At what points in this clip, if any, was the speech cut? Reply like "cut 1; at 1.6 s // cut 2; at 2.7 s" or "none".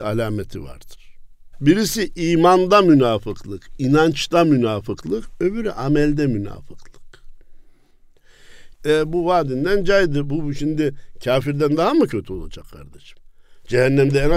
cut 1; at 1.5 s // cut 2; at 8.8 s